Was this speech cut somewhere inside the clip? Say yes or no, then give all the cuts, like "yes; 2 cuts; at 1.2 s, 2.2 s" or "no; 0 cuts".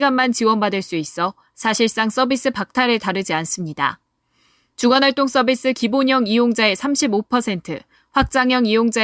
no; 0 cuts